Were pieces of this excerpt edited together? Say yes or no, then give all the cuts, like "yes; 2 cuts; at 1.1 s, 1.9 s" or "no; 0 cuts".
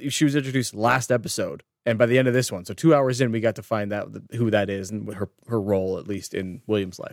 no; 0 cuts